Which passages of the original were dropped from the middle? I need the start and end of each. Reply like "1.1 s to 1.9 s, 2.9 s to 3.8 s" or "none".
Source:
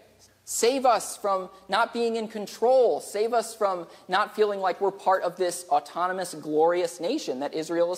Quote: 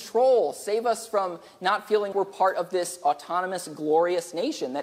4.6 s to 4.8 s